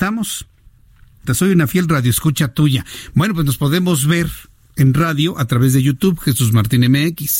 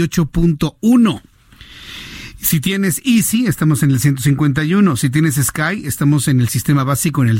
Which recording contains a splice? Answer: first; 1 cut; at 1.3 s

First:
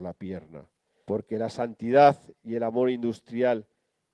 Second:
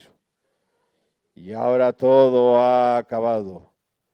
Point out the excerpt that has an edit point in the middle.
first; 1 cut; at 1.0 s

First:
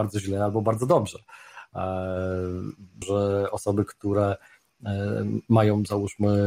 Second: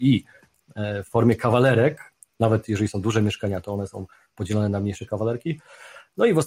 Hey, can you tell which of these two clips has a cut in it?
first; 1 cut; at 3.0 s

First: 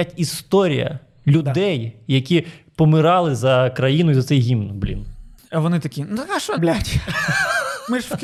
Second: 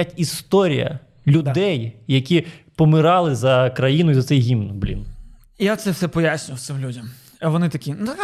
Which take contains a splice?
first; 2 cuts; at 5.4 s, 6.6 s

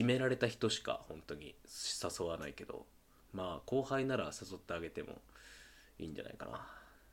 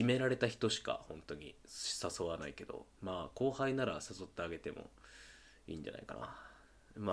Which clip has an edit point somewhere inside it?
second; 1 cut; at 2.9 s

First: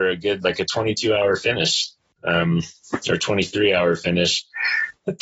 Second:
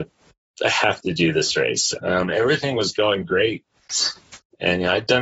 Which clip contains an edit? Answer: second; 2 cuts; at 2.0 s, 3.2 s

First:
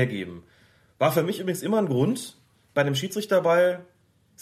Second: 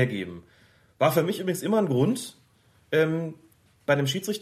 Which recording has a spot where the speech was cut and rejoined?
first; 1 cut; at 2.6 s

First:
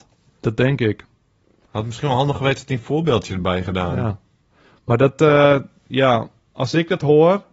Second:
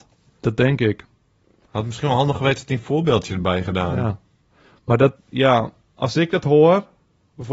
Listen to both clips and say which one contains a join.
second; 1 cut; at 5.2 s

